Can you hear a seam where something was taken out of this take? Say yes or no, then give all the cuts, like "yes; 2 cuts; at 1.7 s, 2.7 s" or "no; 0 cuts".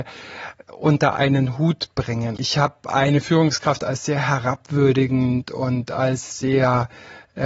yes; 1 cut; at 2.4 s